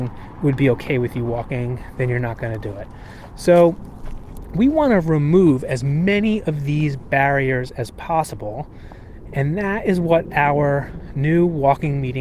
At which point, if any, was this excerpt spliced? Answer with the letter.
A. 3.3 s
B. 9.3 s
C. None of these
C